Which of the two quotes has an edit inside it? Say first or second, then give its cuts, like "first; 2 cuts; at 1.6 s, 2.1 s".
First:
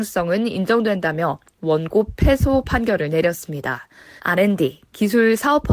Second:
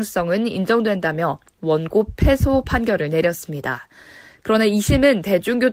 first; 1 cut; at 4.2 s